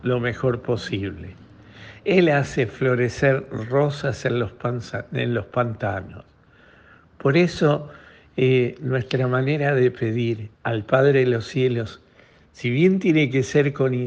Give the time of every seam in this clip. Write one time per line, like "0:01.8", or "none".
0:10.5